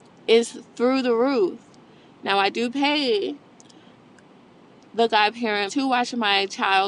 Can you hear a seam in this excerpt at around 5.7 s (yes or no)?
yes